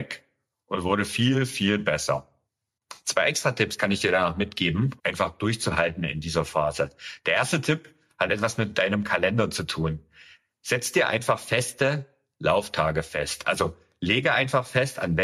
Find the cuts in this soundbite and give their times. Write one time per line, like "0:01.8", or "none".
0:05.0